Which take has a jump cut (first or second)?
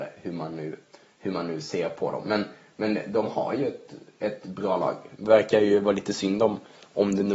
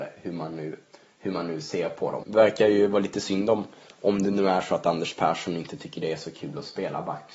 second